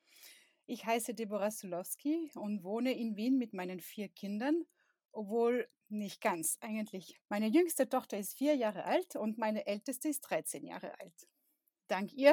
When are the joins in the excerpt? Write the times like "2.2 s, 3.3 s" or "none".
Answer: 7.2 s